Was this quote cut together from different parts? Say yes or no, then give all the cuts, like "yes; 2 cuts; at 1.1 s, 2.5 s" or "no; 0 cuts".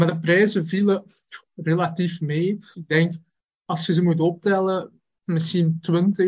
yes; 1 cut; at 2.7 s